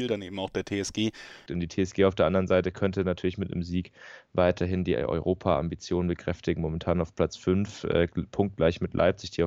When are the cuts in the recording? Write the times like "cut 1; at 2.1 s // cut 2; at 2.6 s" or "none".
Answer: cut 1; at 1.5 s